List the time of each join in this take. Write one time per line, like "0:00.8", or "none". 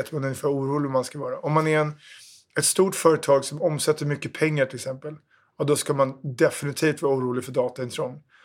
none